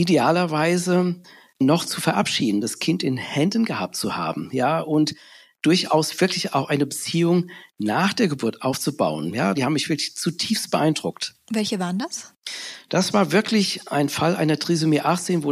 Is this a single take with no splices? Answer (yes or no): no